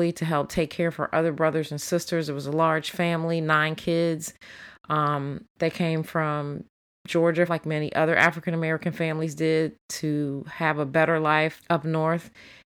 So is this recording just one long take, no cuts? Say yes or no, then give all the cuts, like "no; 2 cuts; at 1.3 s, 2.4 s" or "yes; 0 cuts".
no; 2 cuts; at 7.5 s, 11.6 s